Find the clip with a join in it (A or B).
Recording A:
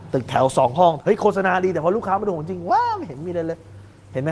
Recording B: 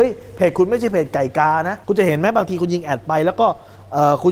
B